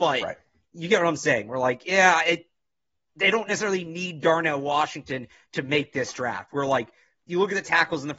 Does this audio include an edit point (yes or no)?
no